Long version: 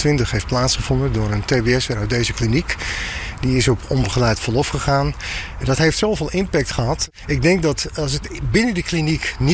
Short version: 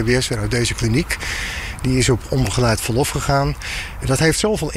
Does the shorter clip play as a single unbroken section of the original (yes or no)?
yes